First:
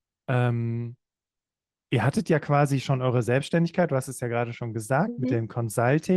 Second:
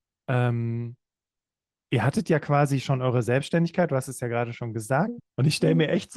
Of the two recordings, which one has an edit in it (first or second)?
second